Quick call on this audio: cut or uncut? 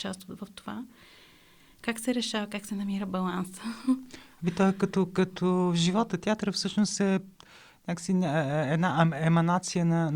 uncut